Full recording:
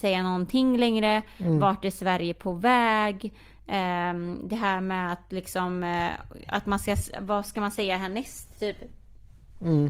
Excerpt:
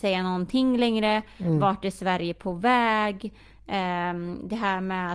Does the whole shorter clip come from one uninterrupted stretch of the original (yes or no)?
yes